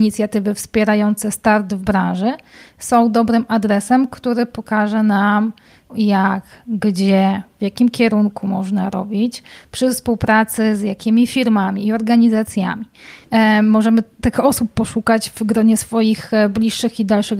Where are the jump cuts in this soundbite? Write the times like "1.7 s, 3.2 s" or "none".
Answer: 5.9 s, 13.2 s